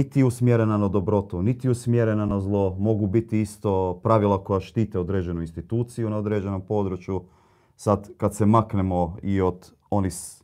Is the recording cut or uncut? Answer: uncut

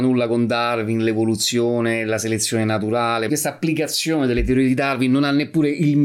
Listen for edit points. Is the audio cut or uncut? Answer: cut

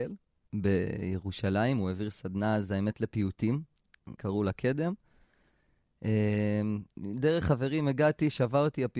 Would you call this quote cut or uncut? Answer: cut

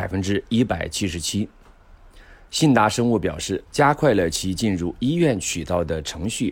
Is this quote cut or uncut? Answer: cut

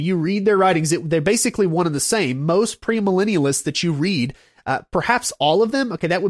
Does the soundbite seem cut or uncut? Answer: uncut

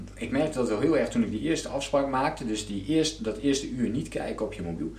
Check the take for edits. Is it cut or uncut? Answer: uncut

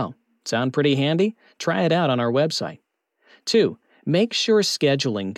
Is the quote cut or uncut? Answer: uncut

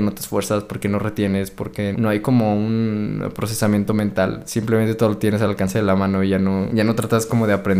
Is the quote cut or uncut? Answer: cut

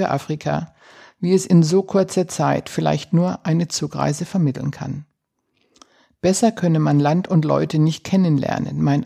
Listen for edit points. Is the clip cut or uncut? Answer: uncut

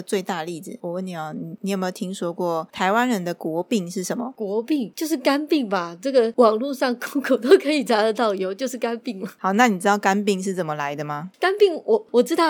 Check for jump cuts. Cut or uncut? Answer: uncut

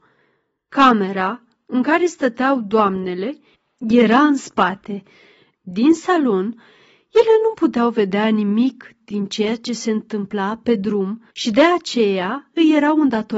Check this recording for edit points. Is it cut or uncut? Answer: cut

